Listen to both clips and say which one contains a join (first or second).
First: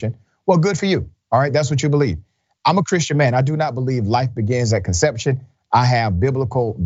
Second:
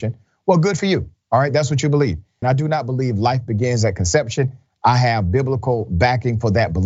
second